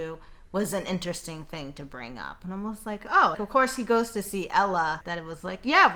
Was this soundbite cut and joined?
yes; 2 cuts; at 3.3 s, 5.0 s

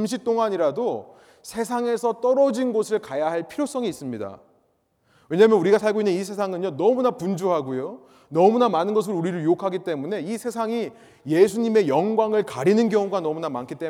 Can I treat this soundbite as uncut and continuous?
yes; 0 cuts

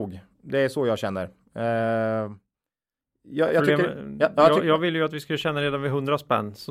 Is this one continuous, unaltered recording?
yes; 0 cuts

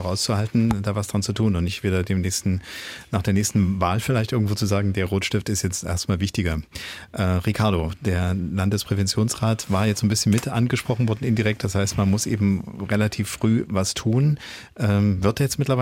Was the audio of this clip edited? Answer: no; 0 cuts

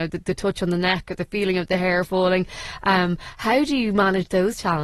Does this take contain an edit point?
no; 0 cuts

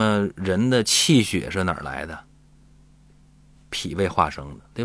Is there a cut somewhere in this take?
no; 0 cuts

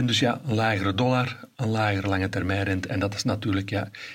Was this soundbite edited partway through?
no; 0 cuts

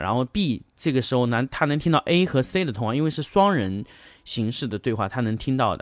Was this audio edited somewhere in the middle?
no; 0 cuts

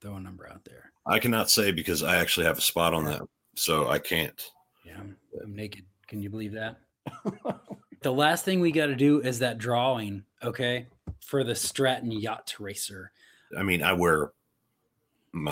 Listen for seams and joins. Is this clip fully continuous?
no; 3 cuts; at 4.7 s, 8.0 s, 13.5 s

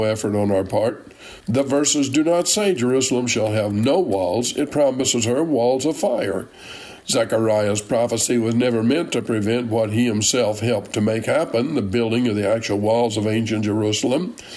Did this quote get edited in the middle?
yes; 2 cuts; at 1.4 s, 7.0 s

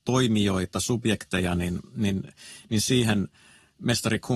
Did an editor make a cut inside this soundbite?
no; 0 cuts

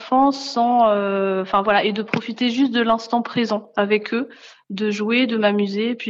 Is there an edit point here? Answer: no; 0 cuts

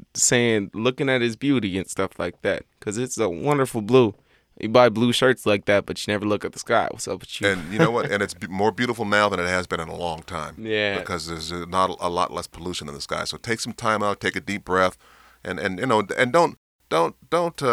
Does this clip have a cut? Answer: no; 0 cuts

